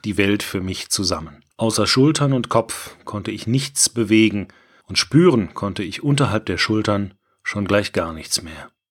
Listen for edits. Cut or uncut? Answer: cut